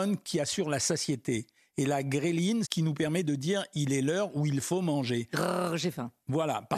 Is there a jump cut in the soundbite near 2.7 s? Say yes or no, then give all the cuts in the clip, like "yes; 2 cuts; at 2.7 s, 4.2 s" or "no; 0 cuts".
yes; 1 cut; at 2.7 s